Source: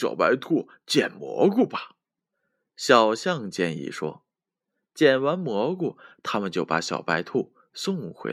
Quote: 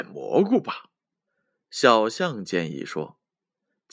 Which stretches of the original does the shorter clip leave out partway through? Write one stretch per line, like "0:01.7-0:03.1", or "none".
none